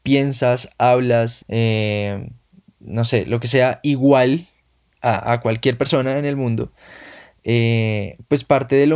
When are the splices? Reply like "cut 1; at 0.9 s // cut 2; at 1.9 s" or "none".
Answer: cut 1; at 1.4 s